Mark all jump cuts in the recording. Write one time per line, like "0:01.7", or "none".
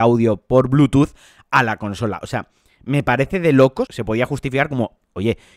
0:03.9